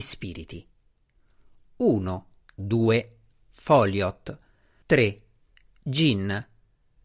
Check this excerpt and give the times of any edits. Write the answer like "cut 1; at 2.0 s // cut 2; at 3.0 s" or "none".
cut 1; at 2.4 s // cut 2; at 4.8 s